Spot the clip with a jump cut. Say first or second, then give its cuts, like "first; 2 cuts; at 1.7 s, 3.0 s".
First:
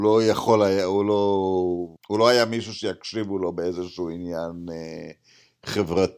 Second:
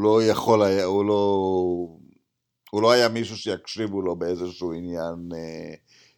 first; 1 cut; at 2.0 s